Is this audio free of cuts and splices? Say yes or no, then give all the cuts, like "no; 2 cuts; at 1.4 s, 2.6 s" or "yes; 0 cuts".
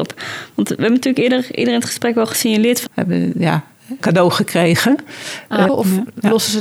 no; 3 cuts; at 2.9 s, 4.0 s, 5.7 s